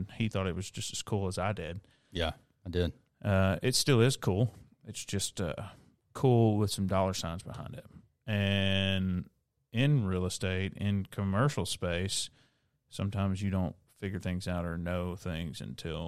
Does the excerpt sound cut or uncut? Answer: uncut